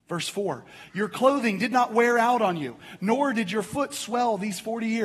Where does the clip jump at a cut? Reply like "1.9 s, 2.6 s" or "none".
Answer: none